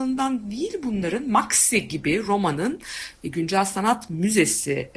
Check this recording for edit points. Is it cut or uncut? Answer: uncut